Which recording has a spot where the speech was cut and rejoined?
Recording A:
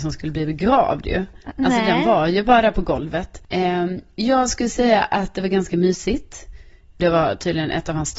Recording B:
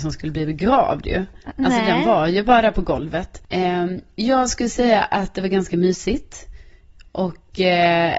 A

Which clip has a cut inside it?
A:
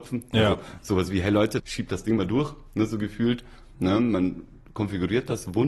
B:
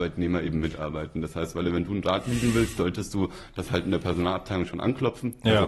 A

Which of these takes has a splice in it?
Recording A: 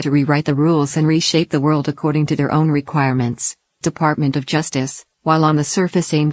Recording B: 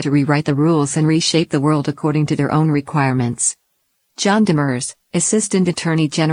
A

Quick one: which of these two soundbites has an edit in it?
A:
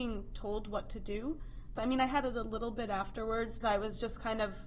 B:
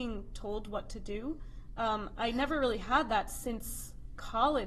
A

